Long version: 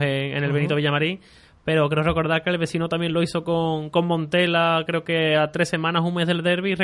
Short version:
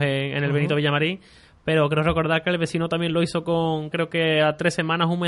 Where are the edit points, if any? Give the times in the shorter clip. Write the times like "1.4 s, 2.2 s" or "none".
3.9 s